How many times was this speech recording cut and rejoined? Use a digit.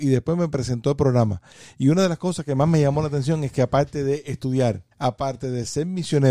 1